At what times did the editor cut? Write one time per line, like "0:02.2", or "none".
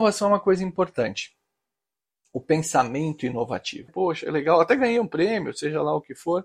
0:03.9